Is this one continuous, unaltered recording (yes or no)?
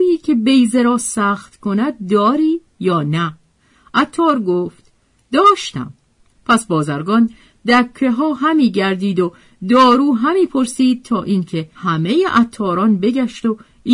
no